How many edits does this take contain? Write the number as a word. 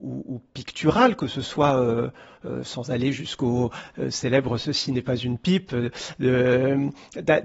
zero